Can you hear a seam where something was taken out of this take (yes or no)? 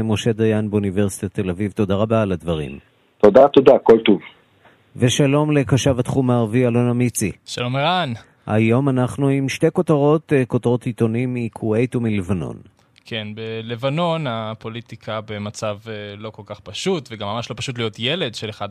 no